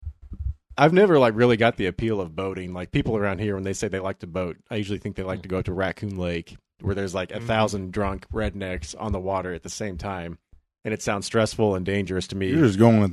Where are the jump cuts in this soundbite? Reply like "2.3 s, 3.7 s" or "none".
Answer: none